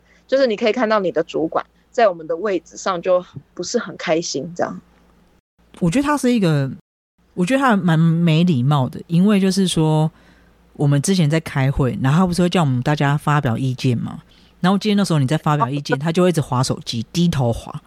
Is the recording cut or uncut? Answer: uncut